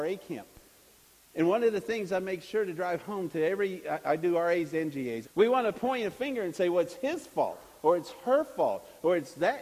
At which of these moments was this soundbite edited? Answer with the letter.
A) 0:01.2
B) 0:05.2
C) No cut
B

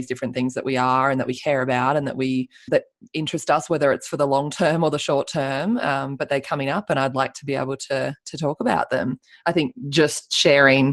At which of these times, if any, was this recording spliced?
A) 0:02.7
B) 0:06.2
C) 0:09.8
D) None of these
A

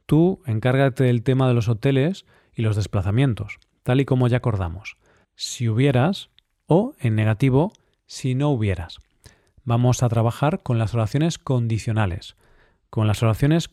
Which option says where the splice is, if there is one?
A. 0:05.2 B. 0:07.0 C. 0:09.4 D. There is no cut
A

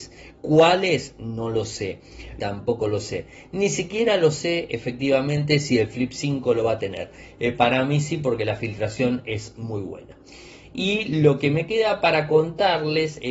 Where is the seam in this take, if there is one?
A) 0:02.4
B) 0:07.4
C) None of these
A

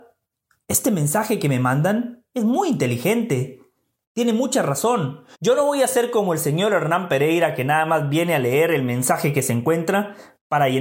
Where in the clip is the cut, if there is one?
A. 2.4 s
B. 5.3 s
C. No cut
B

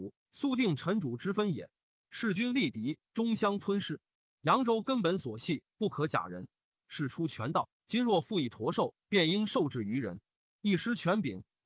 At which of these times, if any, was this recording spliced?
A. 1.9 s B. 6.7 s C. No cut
B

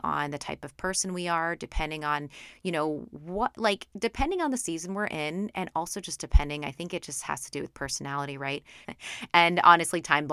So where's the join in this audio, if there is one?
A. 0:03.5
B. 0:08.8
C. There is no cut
B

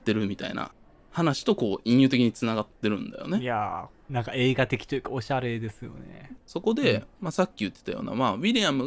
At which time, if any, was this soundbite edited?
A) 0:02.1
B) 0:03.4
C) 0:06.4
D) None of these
C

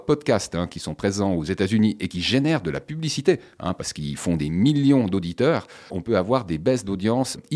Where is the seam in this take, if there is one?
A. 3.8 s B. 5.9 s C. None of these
B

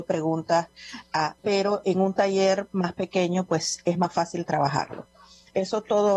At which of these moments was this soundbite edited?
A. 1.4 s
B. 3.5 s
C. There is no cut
A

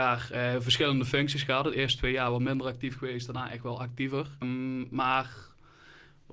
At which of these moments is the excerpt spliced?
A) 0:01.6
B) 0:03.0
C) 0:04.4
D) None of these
C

